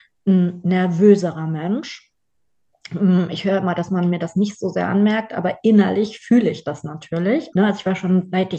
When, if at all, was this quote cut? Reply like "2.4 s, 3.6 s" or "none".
7.5 s